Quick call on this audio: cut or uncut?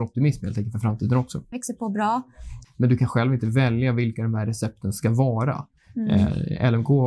cut